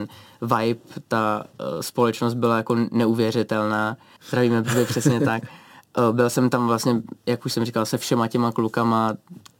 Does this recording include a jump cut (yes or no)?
yes